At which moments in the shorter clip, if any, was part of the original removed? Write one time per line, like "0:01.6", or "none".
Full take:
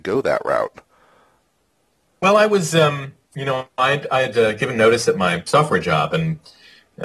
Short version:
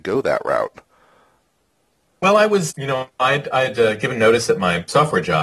0:02.7